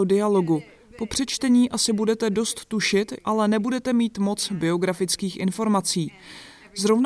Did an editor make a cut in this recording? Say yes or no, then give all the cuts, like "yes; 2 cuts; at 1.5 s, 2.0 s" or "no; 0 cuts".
yes; 1 cut; at 3.2 s